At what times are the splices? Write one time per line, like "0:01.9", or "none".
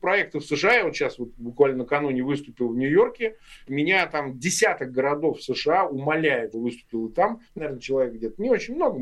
0:03.7
0:06.5
0:07.6